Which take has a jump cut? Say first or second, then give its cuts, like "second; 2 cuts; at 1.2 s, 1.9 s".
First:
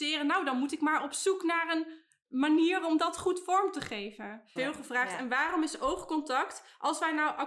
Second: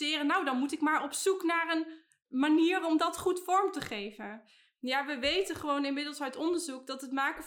first; 1 cut; at 4.6 s